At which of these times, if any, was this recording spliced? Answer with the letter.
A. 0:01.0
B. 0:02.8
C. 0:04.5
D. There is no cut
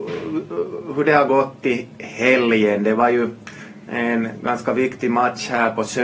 D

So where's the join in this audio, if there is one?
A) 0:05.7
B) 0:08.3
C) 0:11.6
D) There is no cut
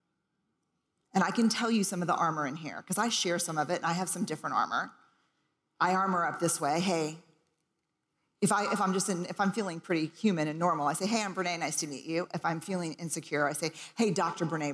D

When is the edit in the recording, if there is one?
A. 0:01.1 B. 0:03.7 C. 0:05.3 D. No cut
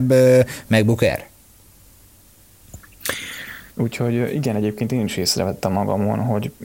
B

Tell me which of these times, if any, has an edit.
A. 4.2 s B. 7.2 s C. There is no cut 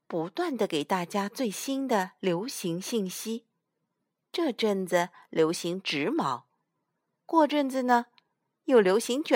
C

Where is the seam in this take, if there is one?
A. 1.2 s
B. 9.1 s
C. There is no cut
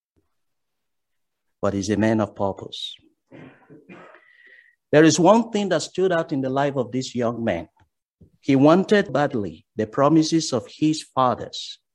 B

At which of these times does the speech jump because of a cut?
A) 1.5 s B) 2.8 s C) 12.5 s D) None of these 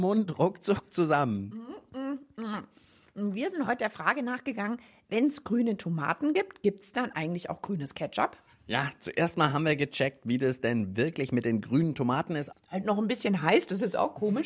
C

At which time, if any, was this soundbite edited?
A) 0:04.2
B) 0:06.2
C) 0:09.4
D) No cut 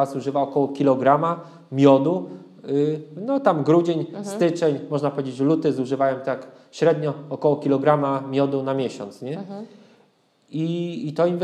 D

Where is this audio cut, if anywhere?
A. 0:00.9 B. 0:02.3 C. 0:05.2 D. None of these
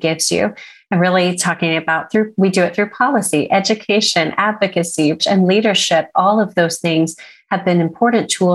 C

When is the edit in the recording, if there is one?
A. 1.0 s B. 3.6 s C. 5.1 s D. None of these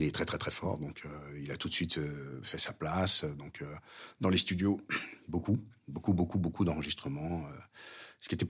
D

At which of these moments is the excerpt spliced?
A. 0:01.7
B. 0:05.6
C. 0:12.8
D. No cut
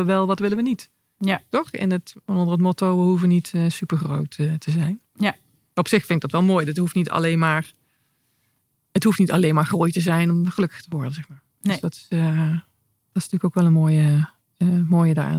D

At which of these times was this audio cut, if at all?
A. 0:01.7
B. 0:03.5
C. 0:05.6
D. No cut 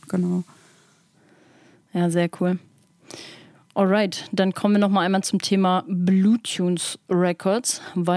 D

